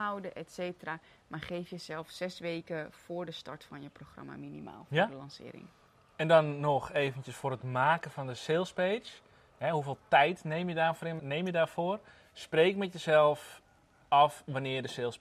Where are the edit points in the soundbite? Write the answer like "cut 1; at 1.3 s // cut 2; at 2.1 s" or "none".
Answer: cut 1; at 11.2 s